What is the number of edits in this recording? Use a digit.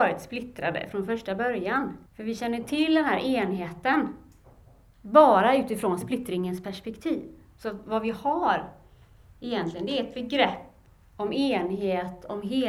1